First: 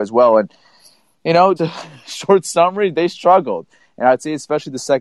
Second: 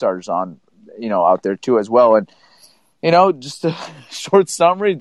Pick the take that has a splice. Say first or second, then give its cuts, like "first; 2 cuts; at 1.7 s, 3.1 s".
first; 1 cut; at 1.6 s